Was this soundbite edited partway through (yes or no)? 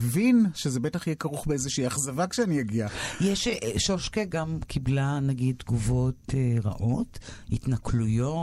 no